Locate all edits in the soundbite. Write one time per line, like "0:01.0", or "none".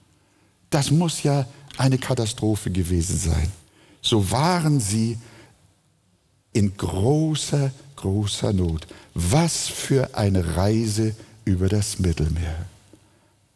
none